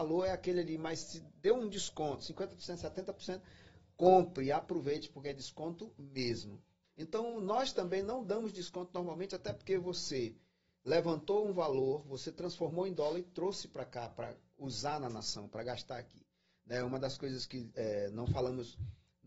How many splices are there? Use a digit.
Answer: 2